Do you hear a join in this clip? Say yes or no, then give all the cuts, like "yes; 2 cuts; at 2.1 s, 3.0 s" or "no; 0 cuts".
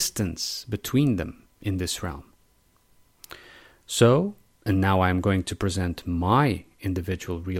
no; 0 cuts